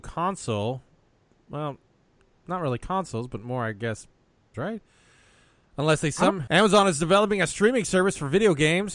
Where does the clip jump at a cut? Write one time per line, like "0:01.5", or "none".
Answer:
0:04.5
0:06.5